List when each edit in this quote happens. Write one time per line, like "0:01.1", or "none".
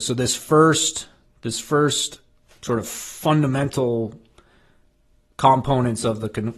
none

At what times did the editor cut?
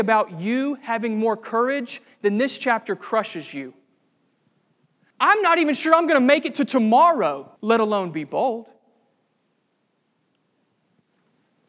0:05.1
0:07.6

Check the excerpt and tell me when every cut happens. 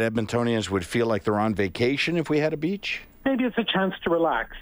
0:03.1

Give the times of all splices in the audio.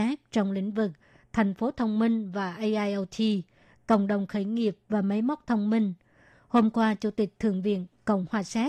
0:06.3

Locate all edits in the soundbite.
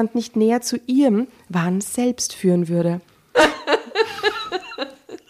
0:03.3

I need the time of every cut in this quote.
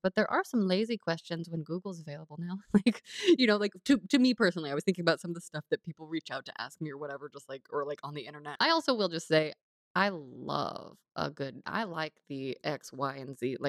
0:08.6
0:11.6

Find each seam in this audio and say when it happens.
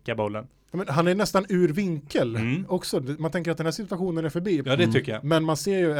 0:04.6

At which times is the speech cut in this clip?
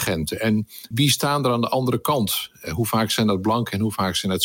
0:00.9

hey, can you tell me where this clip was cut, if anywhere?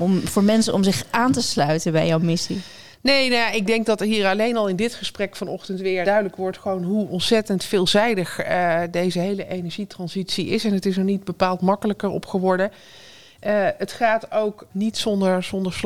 0:06.0
0:14.7

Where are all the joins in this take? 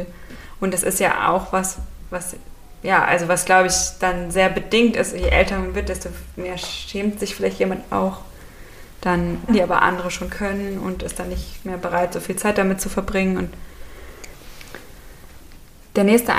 0:09.5

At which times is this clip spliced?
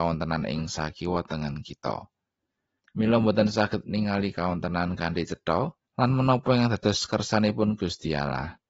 0:02.8
0:05.8

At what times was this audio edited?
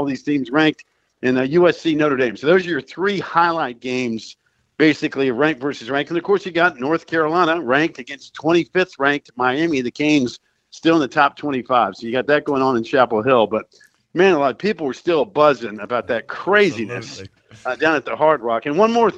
none

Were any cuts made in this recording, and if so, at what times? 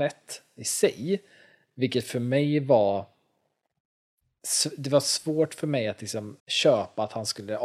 0:06.4

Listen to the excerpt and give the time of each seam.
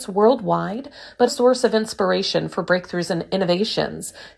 0:01.3

